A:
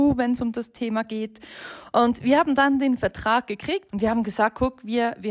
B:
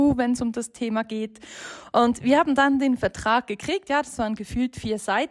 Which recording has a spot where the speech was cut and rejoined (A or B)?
A